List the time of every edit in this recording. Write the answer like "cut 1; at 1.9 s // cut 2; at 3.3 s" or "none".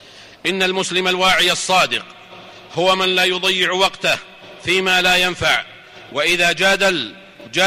none